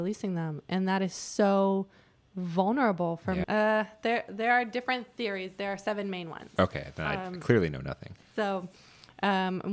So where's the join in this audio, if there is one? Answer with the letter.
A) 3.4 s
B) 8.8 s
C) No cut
A